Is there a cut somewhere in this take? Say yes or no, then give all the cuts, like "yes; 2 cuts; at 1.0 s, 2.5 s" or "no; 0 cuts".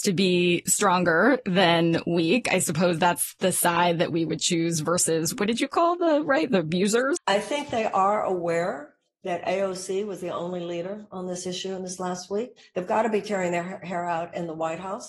yes; 1 cut; at 7.2 s